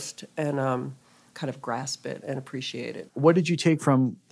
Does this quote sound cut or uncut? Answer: cut